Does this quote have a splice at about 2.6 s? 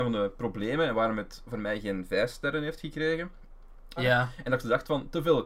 no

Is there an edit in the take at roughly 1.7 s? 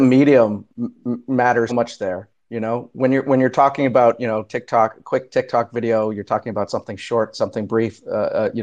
yes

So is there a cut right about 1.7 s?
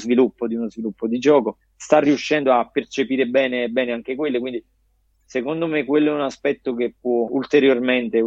no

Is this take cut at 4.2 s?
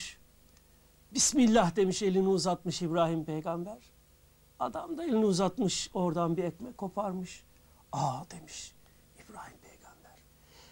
no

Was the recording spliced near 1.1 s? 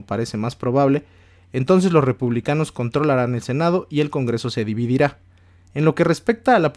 no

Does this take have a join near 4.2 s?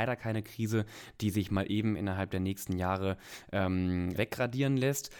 yes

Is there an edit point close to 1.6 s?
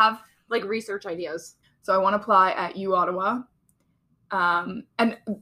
yes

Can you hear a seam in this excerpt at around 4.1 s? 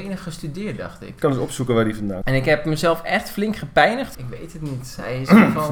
yes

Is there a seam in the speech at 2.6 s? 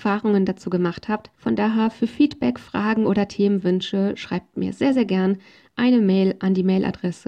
no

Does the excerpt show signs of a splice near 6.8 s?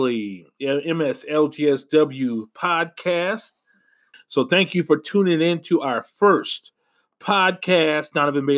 no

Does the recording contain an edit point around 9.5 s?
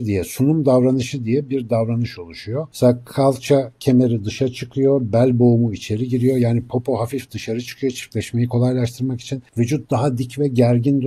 no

